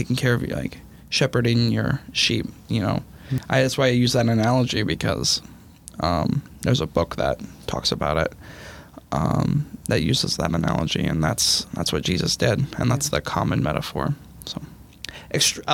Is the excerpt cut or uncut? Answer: uncut